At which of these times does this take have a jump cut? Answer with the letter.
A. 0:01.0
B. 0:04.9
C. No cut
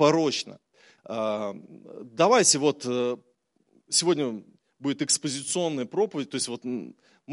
A